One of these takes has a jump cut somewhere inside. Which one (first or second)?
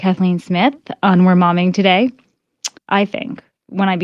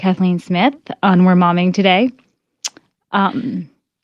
first